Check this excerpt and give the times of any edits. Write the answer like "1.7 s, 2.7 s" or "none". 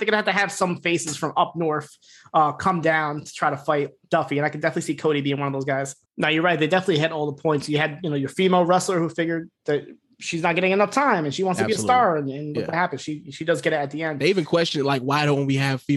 6.1 s